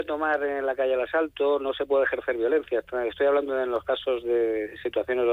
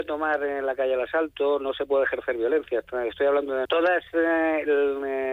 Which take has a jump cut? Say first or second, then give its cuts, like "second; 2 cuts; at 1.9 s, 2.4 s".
second; 1 cut; at 3.7 s